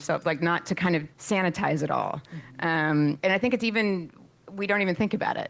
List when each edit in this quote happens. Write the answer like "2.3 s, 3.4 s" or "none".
1.1 s, 3.2 s